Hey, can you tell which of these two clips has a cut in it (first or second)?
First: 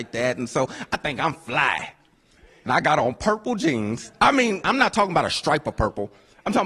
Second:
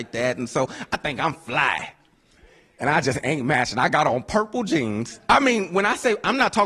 first